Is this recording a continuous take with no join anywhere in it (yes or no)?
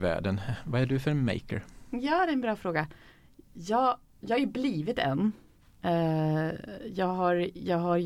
no